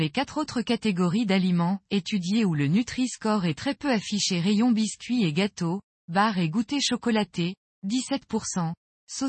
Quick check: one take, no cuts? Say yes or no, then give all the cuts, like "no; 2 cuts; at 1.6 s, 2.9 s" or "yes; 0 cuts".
no; 1 cut; at 6.0 s